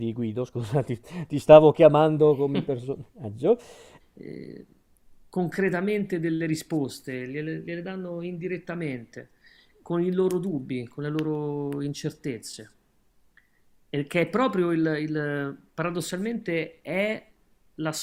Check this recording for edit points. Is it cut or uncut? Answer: cut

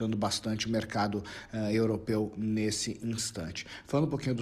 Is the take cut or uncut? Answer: uncut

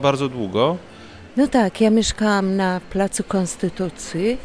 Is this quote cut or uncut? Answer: cut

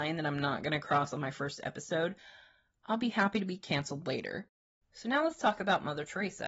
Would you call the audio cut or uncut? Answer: uncut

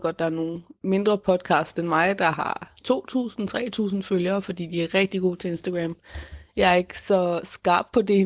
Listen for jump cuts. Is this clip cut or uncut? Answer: uncut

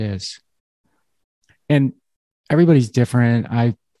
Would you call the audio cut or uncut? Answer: cut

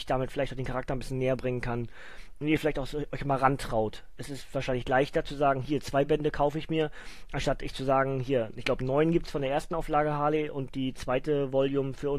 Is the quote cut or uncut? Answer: uncut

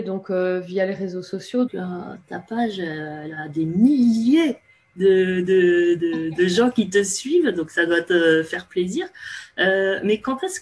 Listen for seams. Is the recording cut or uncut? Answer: cut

